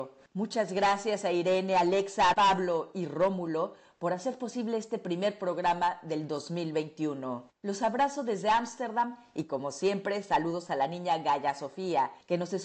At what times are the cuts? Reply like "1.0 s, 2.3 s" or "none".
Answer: 2.3 s